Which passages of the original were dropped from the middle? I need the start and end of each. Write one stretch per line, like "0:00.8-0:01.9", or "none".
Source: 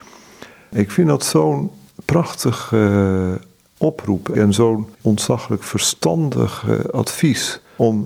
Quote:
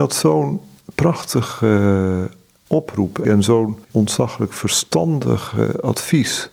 none